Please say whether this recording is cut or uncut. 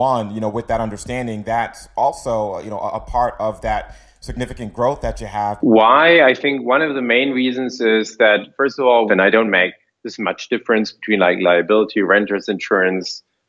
cut